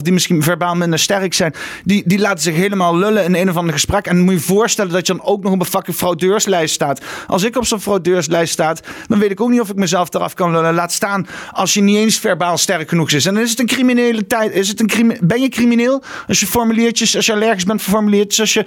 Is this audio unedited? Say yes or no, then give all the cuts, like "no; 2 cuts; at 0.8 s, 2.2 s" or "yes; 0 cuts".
yes; 0 cuts